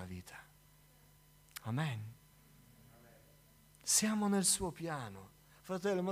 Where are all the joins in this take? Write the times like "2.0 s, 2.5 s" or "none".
none

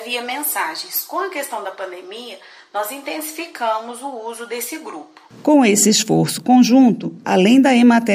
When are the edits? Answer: 7.2 s

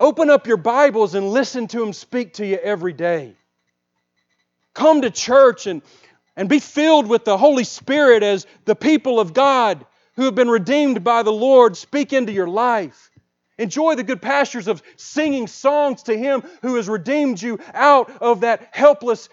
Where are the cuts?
11.7 s

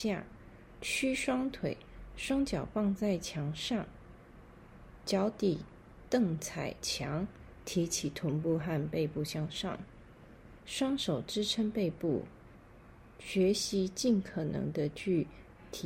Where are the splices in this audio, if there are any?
10.6 s

